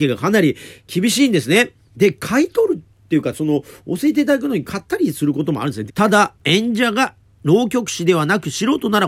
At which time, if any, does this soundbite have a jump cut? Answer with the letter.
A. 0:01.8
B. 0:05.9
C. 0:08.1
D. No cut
B